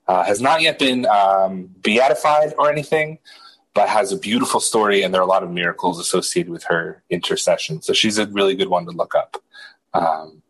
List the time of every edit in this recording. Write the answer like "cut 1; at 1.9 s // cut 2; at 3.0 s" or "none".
none